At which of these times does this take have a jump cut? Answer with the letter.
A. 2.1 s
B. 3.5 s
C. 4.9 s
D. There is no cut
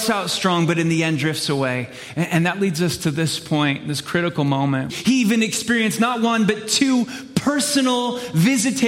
C